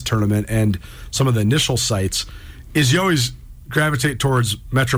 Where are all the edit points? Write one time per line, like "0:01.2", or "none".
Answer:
none